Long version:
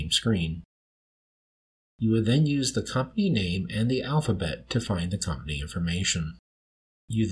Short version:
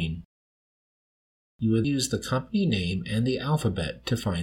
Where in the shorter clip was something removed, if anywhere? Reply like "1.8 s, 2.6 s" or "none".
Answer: 1.8 s